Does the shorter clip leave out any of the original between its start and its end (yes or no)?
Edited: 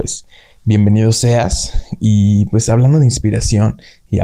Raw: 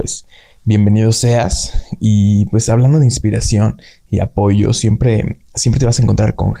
no